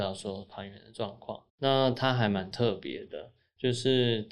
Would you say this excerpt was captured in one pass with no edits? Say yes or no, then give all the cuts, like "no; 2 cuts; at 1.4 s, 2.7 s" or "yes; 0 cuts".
no; 1 cut; at 1.5 s